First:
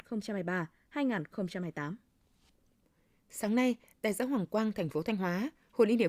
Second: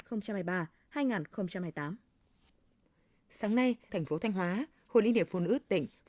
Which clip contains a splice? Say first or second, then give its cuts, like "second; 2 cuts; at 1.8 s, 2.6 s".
second; 1 cut; at 3.9 s